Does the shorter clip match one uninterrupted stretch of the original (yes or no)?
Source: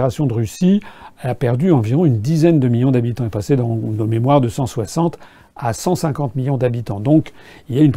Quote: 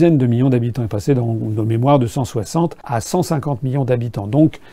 no